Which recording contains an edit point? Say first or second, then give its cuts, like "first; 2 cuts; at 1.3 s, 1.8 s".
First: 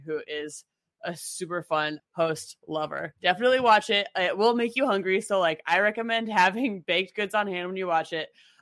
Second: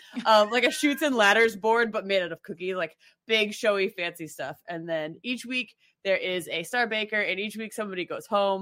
first; 1 cut; at 2.0 s